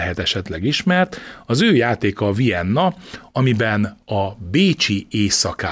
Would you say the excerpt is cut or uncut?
uncut